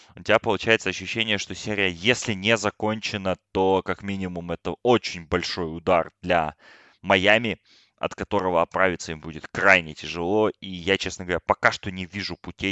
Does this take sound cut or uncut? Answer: uncut